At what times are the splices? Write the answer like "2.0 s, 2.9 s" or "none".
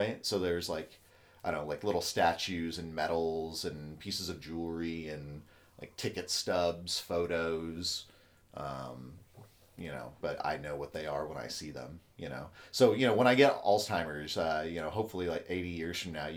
10.2 s